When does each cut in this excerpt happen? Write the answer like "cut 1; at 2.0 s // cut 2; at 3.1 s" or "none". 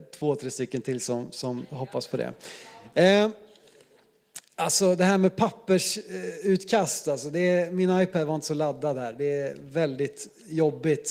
none